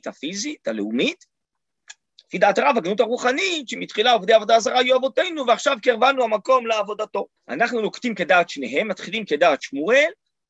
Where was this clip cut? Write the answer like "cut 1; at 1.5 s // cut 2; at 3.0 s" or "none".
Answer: cut 1; at 7.4 s